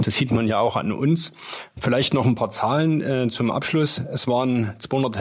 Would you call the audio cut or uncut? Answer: uncut